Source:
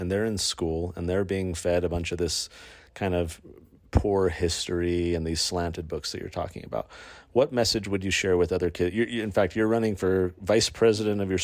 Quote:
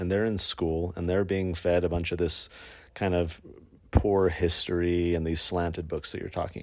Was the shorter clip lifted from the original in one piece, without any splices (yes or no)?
yes